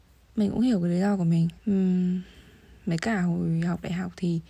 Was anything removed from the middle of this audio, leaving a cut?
no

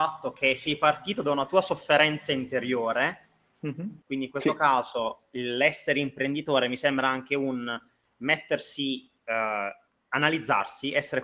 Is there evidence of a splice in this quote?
yes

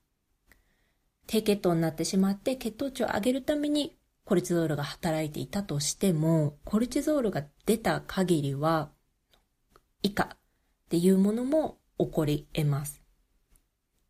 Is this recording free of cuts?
yes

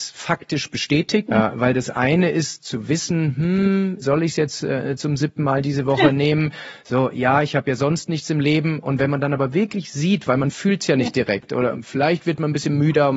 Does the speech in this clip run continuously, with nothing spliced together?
no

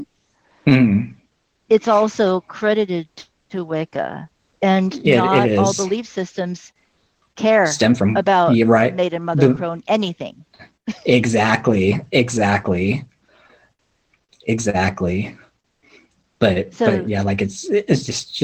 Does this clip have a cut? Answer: no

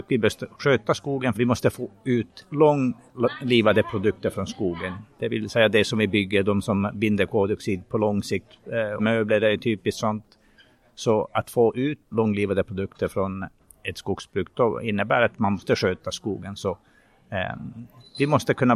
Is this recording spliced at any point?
yes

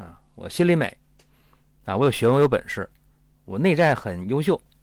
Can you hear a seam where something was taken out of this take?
no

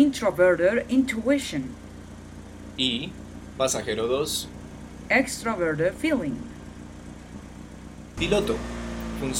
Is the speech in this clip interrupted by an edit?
yes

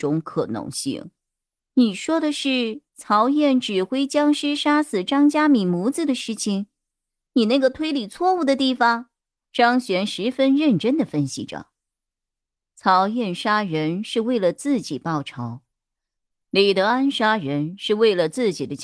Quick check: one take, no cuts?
no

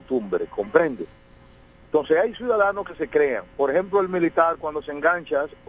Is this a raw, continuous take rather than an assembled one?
yes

